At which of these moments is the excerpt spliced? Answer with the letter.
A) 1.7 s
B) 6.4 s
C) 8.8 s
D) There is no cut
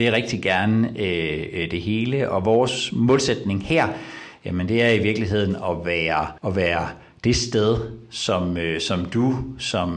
B